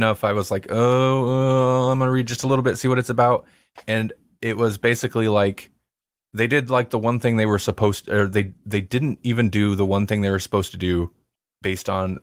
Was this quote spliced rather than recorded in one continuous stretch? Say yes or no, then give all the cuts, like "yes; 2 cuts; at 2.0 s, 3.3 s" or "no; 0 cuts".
no; 0 cuts